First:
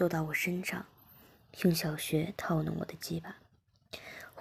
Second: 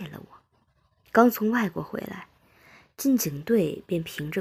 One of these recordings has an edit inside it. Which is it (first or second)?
second